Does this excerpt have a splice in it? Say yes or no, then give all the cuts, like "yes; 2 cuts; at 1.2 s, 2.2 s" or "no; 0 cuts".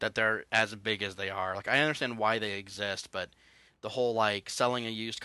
no; 0 cuts